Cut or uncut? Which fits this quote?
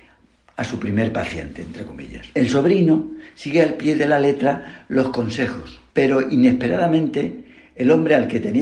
cut